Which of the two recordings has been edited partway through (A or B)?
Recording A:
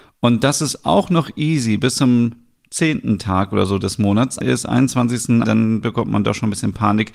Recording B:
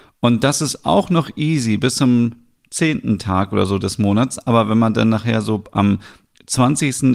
A